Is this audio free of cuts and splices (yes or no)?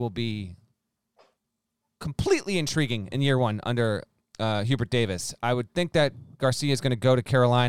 yes